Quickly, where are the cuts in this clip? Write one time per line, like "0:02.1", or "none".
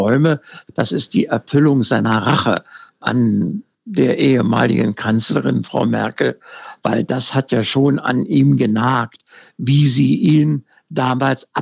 none